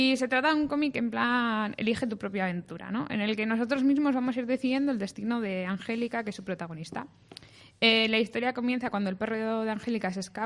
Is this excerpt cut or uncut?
uncut